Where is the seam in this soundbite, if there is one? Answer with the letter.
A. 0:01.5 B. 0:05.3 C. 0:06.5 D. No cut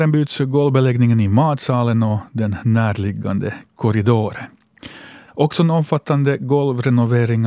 B